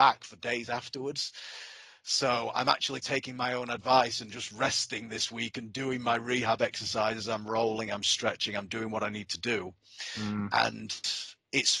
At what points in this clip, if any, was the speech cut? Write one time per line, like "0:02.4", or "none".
none